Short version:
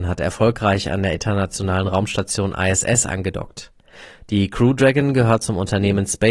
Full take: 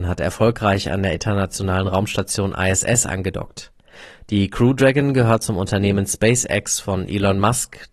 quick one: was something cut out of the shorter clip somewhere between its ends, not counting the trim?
no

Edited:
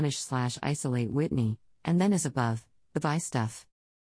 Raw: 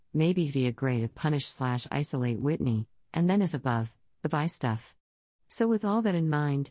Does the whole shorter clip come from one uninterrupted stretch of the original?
yes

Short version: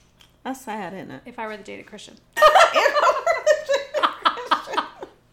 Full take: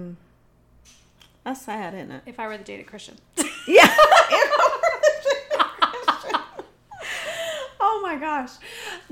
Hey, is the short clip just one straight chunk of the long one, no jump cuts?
no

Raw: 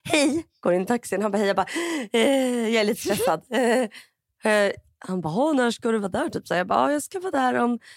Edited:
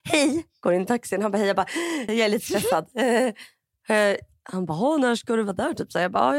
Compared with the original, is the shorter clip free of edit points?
no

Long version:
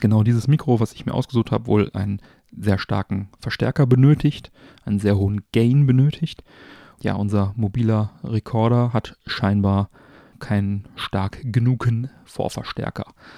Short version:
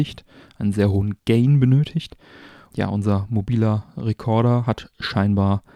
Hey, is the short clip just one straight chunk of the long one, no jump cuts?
yes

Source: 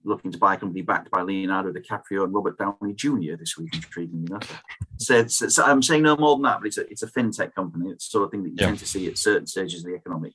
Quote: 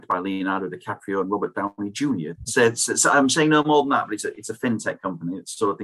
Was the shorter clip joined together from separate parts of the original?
yes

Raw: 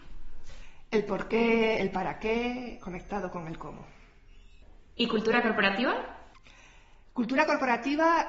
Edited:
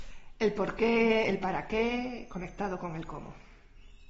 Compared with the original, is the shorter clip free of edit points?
yes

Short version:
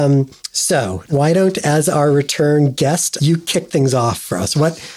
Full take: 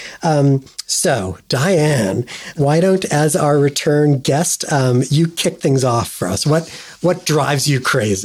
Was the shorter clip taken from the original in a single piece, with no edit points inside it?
no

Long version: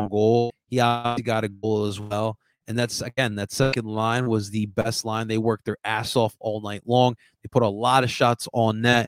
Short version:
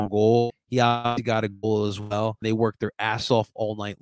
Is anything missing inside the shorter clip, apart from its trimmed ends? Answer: yes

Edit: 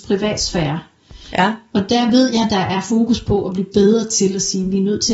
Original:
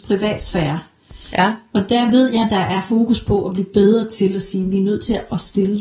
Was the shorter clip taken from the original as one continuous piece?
yes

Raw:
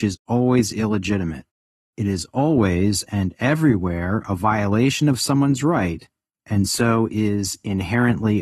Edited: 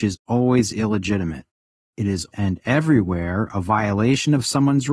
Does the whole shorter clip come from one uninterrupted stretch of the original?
no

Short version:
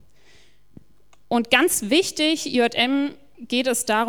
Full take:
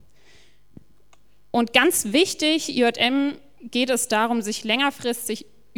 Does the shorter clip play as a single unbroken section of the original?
no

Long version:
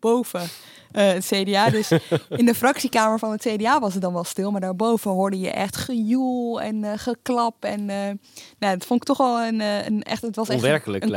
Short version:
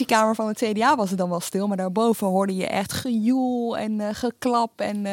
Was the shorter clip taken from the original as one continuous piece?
yes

